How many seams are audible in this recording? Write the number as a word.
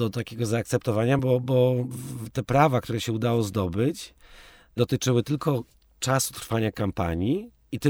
zero